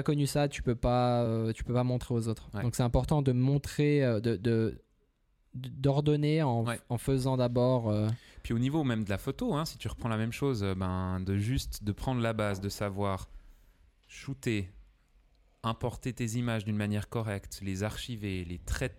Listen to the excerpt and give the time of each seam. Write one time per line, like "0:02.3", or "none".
none